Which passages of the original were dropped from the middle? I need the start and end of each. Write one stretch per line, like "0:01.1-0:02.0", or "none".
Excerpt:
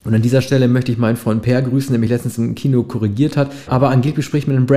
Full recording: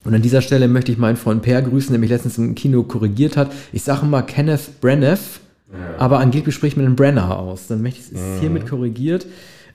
0:03.7-0:06.0